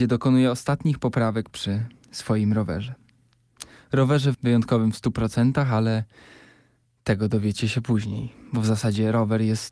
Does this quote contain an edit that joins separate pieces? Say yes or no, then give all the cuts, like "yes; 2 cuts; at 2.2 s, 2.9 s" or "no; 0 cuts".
yes; 1 cut; at 4.3 s